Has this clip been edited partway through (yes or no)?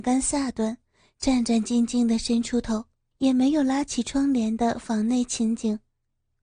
yes